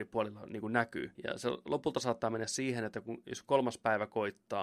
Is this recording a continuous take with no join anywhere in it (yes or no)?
no